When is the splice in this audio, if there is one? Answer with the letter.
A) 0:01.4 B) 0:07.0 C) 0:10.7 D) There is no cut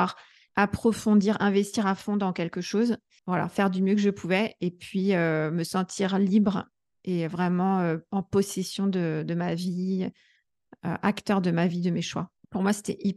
D